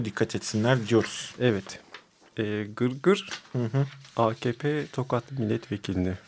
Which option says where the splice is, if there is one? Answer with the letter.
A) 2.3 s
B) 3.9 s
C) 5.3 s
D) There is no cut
D